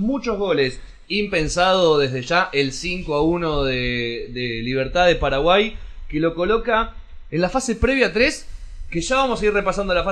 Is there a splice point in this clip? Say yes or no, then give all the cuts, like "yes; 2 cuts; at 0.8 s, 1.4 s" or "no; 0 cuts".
no; 0 cuts